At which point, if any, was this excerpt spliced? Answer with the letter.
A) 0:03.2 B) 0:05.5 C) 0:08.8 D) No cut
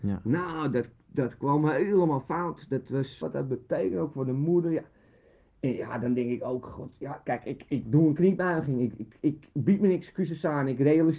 A